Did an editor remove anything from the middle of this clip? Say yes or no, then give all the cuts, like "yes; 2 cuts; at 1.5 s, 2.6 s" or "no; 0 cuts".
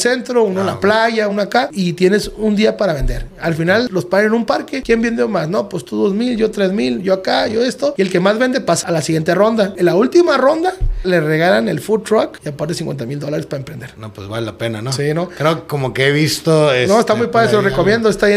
yes; 1 cut; at 1.3 s